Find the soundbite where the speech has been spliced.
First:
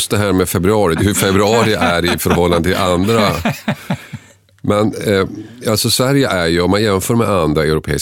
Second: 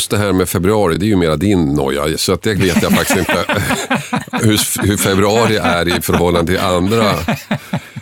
first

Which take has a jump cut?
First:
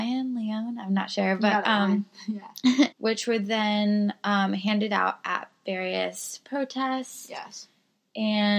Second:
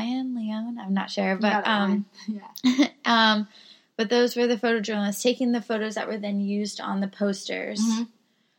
first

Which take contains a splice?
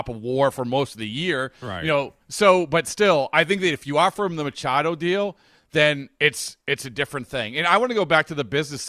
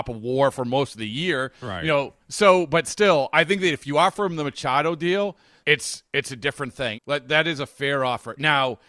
second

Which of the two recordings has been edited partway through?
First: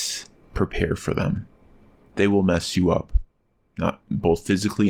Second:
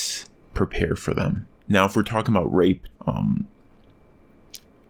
second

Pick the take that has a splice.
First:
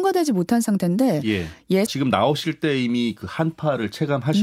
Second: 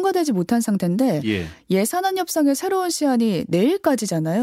first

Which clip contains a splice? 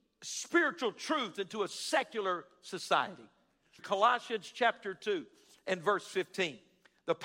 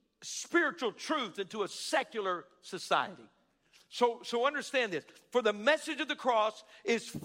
first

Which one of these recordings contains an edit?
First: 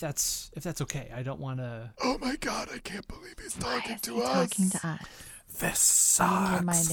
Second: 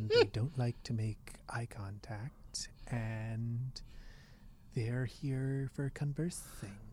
first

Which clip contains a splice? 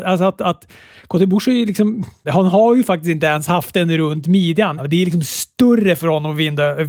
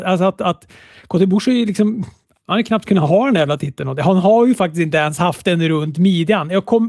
first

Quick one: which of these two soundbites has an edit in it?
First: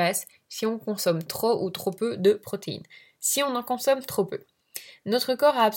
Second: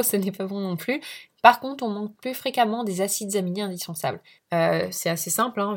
second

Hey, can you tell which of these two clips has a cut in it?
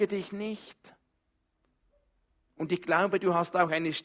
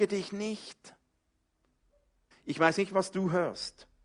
second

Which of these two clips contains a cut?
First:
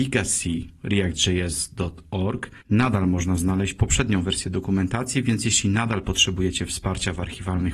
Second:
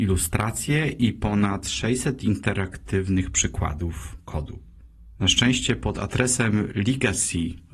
first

